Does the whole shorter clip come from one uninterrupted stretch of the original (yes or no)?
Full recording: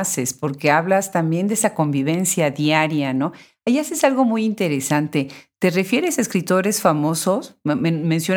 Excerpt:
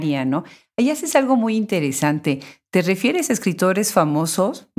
yes